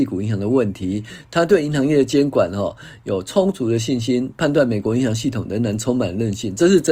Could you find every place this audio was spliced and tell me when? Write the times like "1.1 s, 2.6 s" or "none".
none